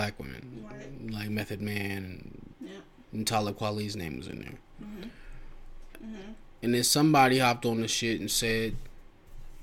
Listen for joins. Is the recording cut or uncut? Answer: cut